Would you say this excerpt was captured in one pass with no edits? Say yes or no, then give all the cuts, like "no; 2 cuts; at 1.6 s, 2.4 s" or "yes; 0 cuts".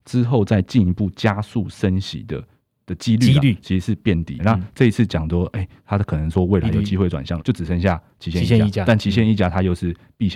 no; 2 cuts; at 4.4 s, 7.4 s